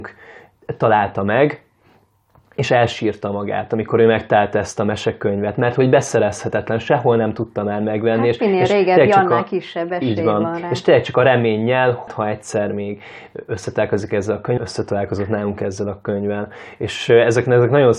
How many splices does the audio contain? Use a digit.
2